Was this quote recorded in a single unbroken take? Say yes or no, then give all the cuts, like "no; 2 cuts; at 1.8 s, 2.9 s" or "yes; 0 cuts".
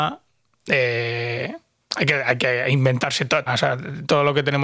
no; 1 cut; at 3.5 s